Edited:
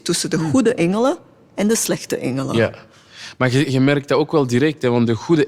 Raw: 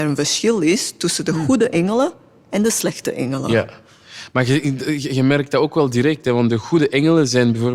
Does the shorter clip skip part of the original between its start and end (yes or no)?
yes